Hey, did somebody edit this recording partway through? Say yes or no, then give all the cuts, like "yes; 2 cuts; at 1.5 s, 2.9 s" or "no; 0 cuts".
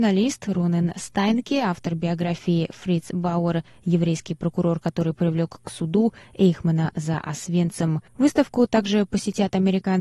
yes; 1 cut; at 8.1 s